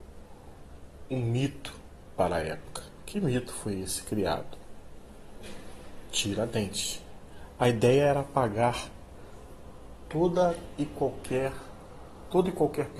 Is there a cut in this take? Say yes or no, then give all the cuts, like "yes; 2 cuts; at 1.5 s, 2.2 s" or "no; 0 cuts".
no; 0 cuts